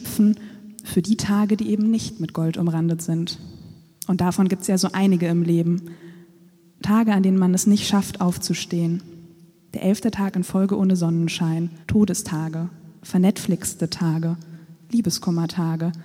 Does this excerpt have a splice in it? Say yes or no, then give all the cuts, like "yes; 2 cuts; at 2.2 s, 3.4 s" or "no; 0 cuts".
yes; 2 cuts; at 9.7 s, 11.8 s